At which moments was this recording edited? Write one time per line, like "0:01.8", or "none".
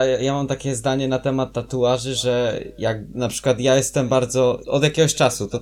0:04.6